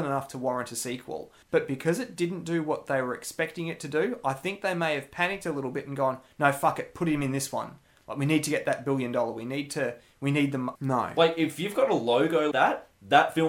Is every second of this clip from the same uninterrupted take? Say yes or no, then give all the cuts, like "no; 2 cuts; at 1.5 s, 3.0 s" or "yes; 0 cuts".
no; 3 cuts; at 1.4 s, 10.8 s, 12.5 s